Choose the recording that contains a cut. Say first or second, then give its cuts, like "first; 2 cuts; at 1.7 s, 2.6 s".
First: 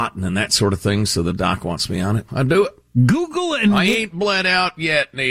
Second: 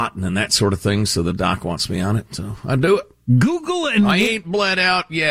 first; 1 cut; at 2.3 s